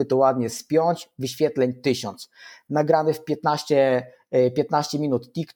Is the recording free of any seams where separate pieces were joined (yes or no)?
yes